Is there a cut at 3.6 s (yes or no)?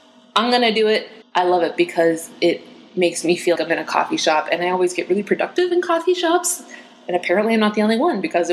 yes